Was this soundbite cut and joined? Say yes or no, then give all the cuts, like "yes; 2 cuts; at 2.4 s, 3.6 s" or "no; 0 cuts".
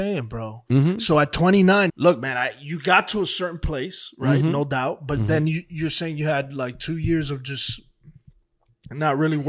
yes; 1 cut; at 1.9 s